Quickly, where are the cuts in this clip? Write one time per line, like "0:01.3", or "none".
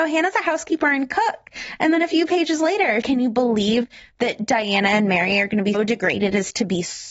0:03.0
0:05.7